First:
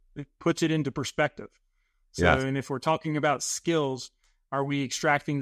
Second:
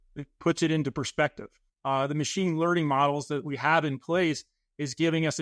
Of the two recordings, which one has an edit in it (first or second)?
second